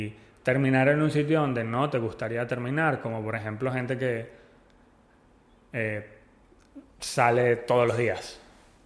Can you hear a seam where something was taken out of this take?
no; 0 cuts

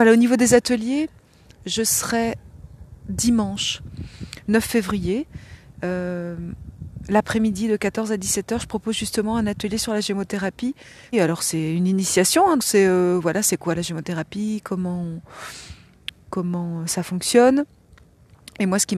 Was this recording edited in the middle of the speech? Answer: yes; 2 cuts; at 11.1 s, 12.6 s

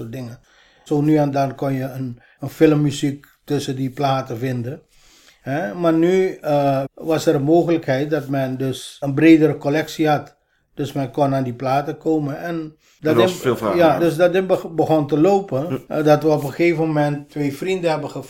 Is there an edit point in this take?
yes; 3 cuts; at 6.9 s, 14.0 s, 17.3 s

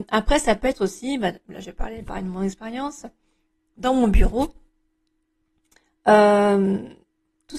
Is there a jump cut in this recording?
no; 0 cuts

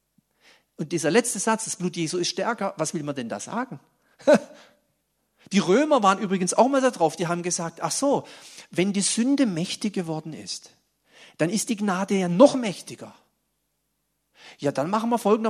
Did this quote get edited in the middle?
no; 0 cuts

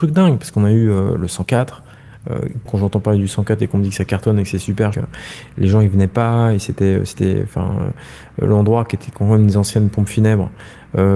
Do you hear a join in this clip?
yes; 2 cuts; at 2.7 s, 4.9 s

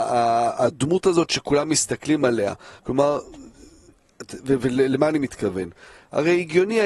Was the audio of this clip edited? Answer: yes; 1 cut; at 2.8 s

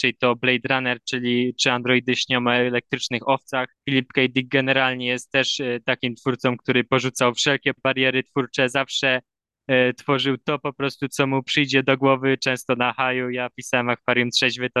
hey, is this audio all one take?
no; 1 cut; at 3.8 s

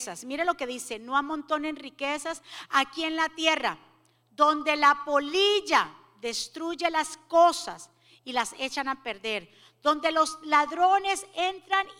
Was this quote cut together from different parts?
no; 0 cuts

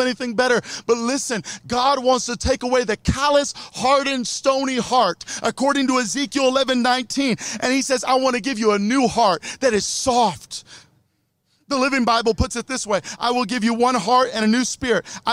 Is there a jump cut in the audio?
no; 0 cuts

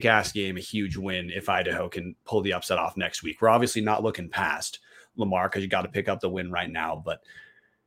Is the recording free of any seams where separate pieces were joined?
yes; 0 cuts

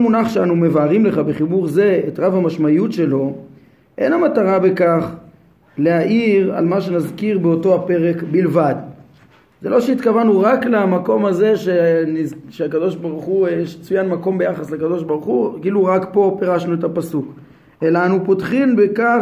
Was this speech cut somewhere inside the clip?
no; 0 cuts

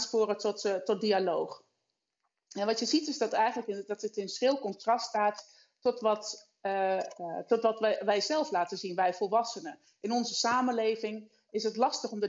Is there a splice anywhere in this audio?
no; 0 cuts

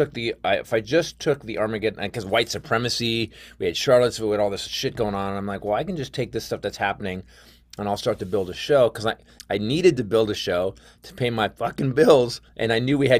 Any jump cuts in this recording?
yes; 1 cut; at 9.4 s

